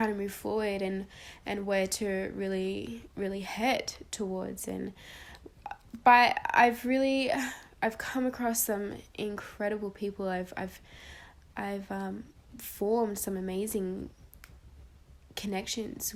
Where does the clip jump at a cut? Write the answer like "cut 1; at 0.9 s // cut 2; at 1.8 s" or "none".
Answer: cut 1; at 12.5 s